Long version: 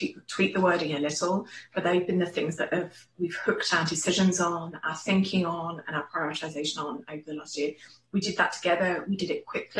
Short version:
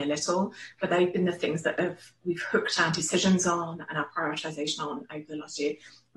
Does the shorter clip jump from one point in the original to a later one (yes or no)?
yes